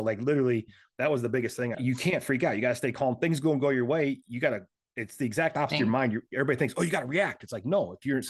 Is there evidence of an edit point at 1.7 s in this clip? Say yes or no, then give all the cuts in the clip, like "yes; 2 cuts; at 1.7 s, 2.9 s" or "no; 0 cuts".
yes; 1 cut; at 1.7 s